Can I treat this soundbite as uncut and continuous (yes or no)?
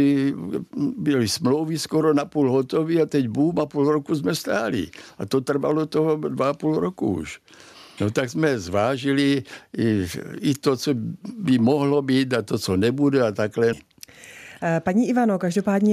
no